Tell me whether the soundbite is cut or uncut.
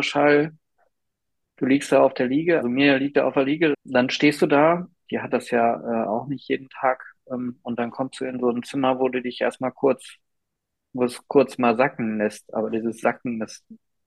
cut